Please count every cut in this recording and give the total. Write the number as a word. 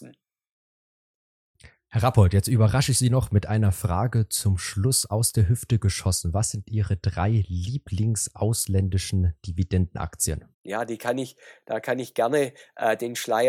one